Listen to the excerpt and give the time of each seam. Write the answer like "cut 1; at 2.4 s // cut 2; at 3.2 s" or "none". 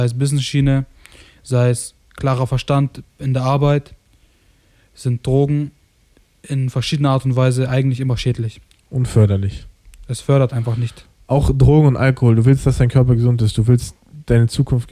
none

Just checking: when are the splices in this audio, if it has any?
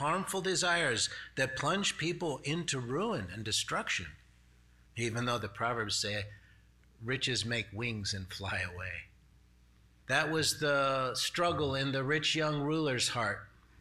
cut 1; at 4.9 s // cut 2; at 10.0 s

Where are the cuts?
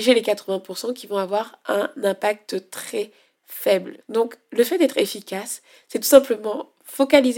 cut 1; at 4.0 s

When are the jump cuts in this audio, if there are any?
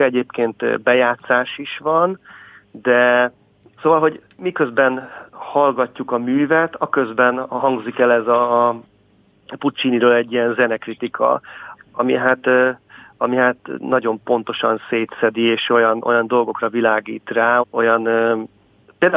cut 1; at 11.8 s // cut 2; at 17.6 s

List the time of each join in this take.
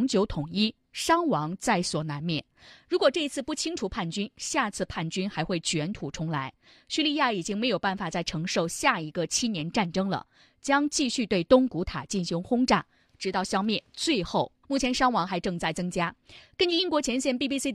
cut 1; at 14.6 s

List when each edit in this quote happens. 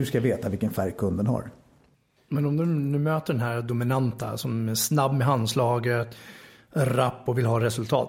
none

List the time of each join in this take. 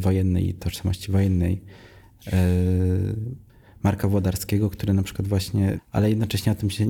cut 1; at 5.8 s

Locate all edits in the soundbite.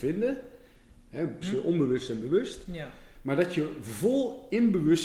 cut 1; at 1.4 s

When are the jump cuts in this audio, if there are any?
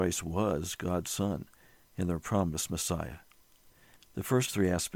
cut 1; at 4.0 s

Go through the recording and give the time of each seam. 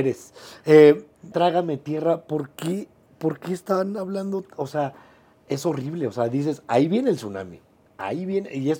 cut 1; at 1.3 s

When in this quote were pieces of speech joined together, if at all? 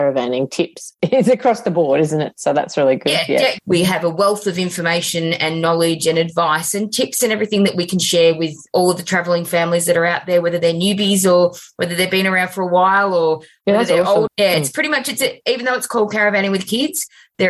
cut 1; at 3.6 s // cut 2; at 14.3 s

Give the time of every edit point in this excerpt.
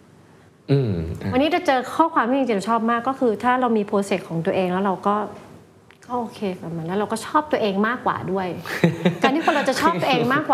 none

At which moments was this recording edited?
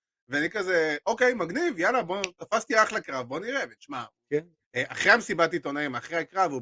cut 1; at 4.6 s

